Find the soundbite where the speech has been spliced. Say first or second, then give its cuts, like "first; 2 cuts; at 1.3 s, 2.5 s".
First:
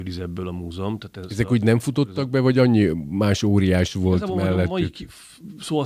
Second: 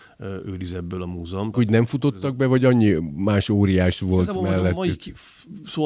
second; 1 cut; at 1.5 s